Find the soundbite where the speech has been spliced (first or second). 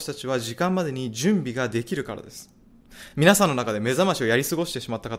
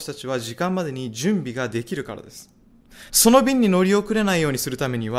second